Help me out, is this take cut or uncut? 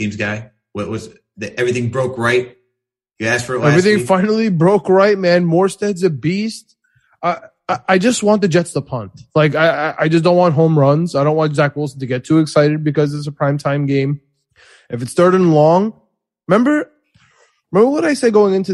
uncut